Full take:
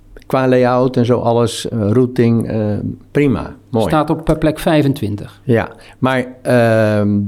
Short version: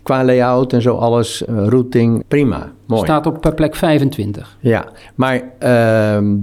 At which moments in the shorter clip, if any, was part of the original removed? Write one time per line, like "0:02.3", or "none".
0:02.2